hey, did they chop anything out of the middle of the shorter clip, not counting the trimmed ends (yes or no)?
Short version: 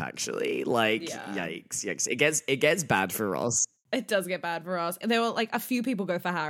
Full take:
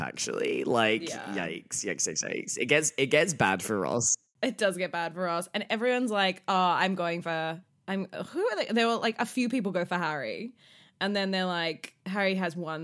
yes